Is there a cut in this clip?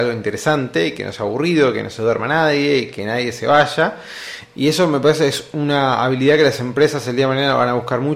yes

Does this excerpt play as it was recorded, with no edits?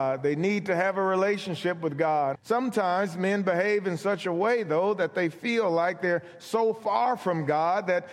no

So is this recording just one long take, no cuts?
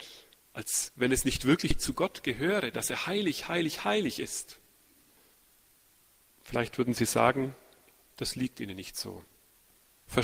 yes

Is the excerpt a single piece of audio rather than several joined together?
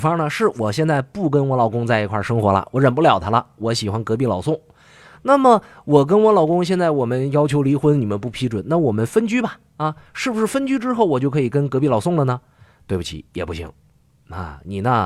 yes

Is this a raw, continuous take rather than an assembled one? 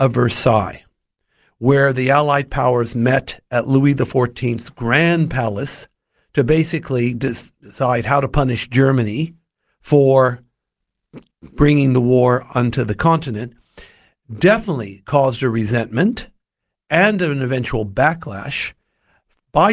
yes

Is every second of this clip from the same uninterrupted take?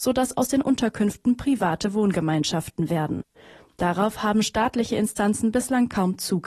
yes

